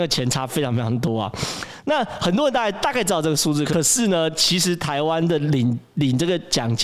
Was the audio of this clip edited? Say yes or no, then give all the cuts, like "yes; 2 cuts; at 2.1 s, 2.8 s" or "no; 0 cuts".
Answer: no; 0 cuts